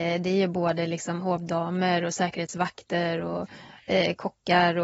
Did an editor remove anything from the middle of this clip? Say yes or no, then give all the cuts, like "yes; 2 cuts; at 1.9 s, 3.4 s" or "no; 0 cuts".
no; 0 cuts